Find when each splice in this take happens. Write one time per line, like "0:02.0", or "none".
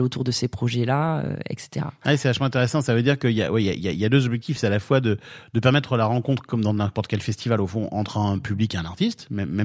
none

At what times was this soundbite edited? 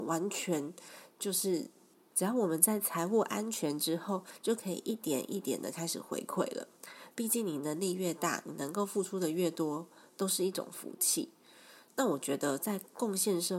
0:02.1
0:07.1

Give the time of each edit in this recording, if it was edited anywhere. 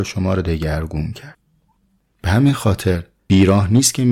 none

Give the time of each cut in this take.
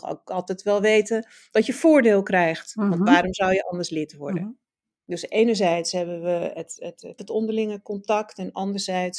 0:07.2

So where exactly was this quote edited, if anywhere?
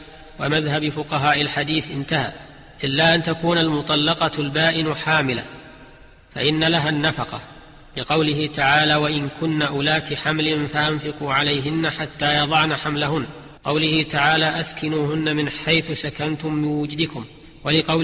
0:13.6

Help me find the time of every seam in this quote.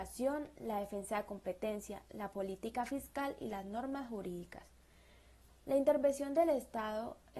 0:05.5

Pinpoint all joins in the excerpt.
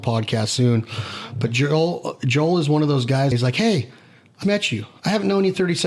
0:03.3
0:04.4

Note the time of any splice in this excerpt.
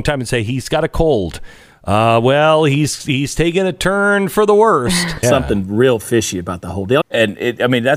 0:05.2
0:07.0

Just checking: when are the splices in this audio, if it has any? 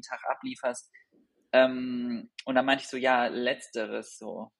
none

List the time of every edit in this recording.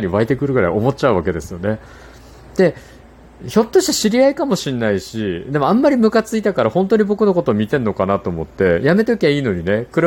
none

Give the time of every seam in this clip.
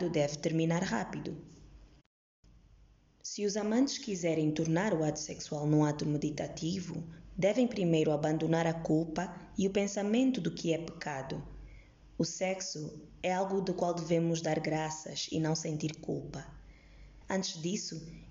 0:17.2

